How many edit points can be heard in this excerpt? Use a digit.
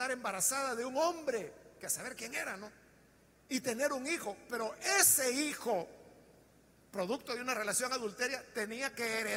0